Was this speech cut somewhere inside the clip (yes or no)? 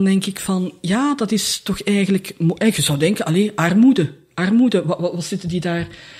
no